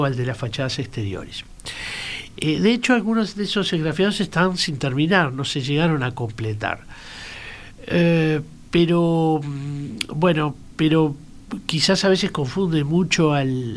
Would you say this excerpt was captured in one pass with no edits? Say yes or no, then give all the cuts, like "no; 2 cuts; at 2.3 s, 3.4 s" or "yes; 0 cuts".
yes; 0 cuts